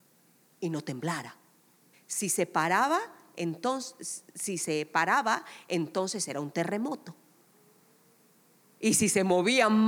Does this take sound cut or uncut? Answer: cut